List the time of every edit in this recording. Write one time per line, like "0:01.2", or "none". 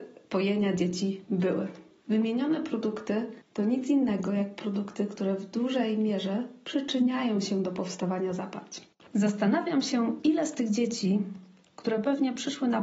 0:02.0